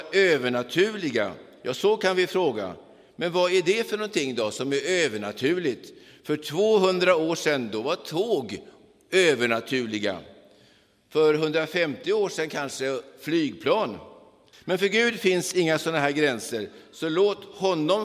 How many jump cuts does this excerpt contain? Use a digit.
1